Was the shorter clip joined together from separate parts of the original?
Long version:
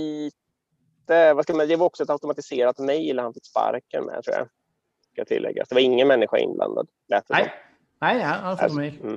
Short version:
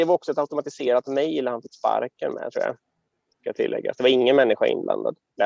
no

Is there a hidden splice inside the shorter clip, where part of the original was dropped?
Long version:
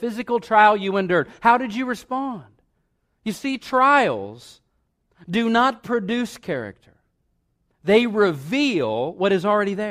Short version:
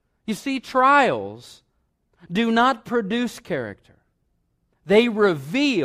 no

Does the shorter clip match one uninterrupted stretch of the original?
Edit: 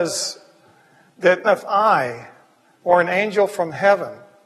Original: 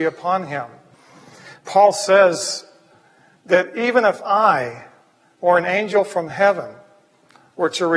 no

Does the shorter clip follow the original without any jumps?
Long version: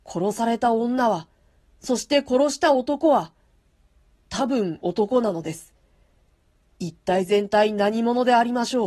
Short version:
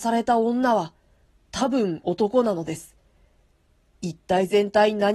no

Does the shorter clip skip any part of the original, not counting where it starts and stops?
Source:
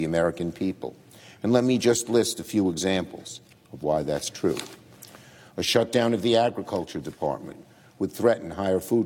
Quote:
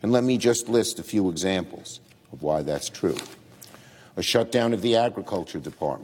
no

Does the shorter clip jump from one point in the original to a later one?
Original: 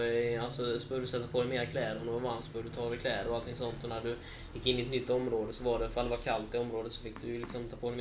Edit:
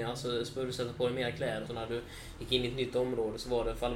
yes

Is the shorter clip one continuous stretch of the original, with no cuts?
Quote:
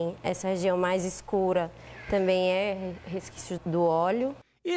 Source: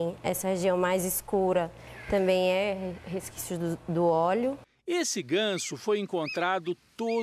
no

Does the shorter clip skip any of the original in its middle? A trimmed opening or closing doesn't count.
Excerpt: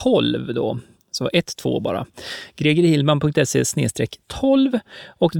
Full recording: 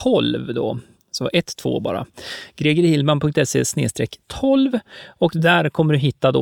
no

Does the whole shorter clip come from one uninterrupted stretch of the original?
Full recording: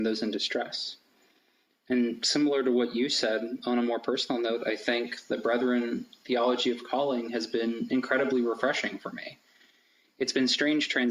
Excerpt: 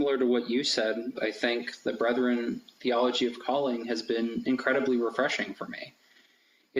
no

